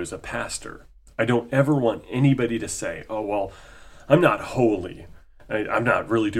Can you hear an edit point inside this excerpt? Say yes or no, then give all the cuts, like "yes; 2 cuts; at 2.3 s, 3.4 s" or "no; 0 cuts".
no; 0 cuts